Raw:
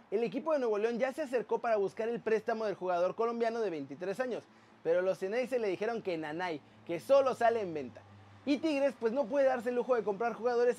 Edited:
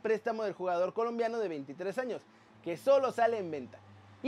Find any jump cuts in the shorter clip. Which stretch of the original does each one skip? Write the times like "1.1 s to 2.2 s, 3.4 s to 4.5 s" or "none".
4.8 s to 6.8 s